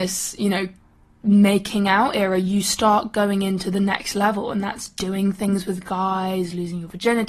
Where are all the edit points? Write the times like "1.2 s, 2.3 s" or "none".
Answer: none